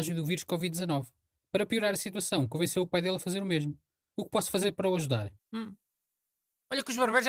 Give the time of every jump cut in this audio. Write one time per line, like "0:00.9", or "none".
0:05.4